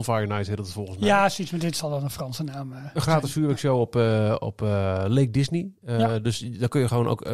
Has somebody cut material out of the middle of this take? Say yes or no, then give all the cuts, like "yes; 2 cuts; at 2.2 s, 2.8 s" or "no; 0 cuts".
no; 0 cuts